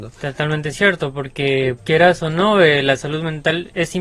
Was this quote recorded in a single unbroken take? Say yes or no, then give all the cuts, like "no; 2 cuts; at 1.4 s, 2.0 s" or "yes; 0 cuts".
no; 1 cut; at 1.8 s